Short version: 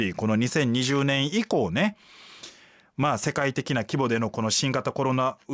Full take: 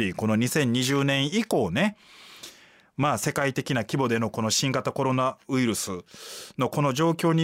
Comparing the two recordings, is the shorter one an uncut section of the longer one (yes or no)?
yes